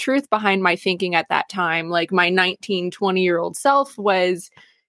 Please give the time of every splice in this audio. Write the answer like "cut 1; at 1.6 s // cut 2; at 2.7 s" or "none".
none